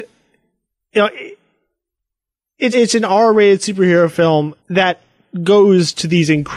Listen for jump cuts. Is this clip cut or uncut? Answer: cut